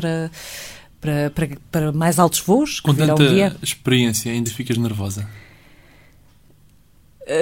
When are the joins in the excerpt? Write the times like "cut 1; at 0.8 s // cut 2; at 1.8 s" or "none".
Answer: none